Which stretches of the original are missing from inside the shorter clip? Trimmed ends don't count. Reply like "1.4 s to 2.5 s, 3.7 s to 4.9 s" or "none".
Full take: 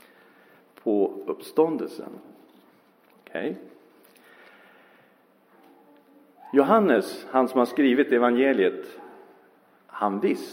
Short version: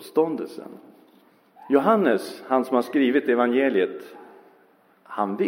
3.0 s to 6.4 s